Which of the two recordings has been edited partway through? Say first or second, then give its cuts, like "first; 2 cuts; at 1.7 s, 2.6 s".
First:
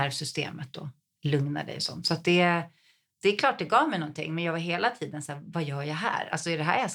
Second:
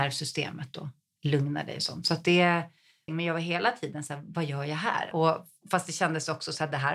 second; 2 cuts; at 3.1 s, 5.1 s